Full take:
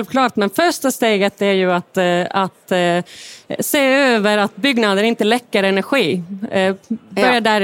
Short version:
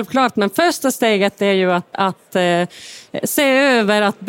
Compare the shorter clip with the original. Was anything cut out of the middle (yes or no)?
yes